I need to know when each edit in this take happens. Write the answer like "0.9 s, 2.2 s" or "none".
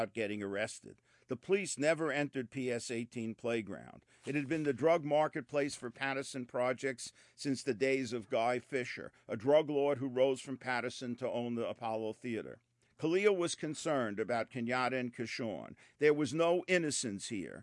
12.9 s, 15.9 s